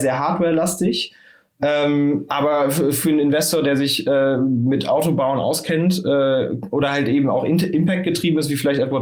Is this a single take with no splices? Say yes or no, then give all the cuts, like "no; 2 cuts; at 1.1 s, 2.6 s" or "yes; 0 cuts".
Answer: yes; 0 cuts